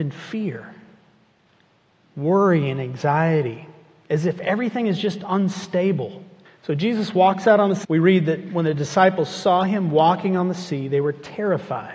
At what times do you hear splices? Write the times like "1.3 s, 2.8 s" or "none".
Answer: 6.5 s, 7.8 s